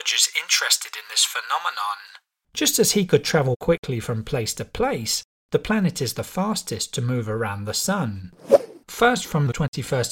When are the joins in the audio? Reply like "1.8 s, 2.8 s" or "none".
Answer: 2.5 s, 8.8 s